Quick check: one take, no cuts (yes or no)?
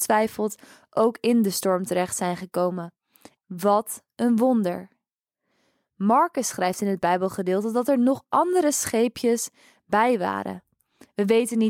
no